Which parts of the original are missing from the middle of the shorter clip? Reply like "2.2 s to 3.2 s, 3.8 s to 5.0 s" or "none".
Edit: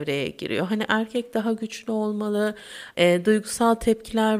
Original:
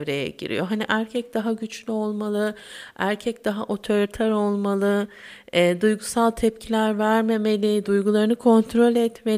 2.9 s to 5.5 s